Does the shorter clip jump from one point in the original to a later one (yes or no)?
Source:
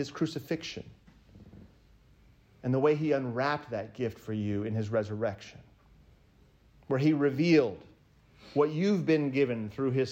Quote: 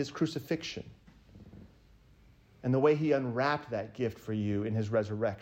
no